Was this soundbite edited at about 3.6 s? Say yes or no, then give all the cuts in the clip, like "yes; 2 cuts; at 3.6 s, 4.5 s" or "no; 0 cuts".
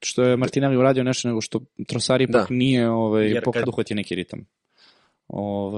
yes; 1 cut; at 3.6 s